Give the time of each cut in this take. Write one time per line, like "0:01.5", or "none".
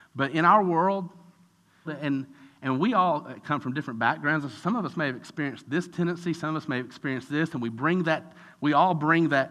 0:01.9